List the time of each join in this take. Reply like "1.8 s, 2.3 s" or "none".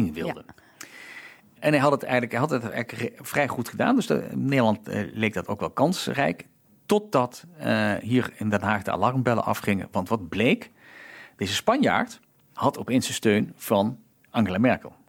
none